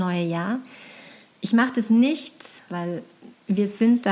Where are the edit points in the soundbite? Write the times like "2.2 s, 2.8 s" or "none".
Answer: 2.7 s